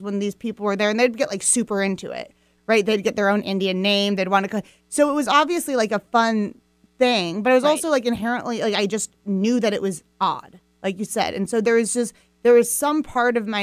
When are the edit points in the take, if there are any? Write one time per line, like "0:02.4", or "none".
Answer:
none